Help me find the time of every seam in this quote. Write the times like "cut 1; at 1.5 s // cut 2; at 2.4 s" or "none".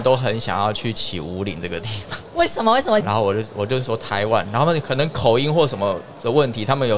cut 1; at 3.0 s